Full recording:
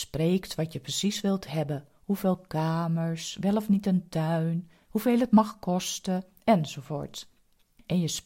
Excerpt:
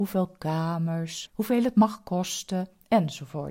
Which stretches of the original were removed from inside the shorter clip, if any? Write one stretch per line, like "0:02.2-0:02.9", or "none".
0:03.4-0:04.8